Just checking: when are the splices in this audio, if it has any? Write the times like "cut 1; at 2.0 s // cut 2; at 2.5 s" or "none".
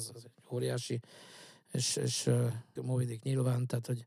cut 1; at 2.8 s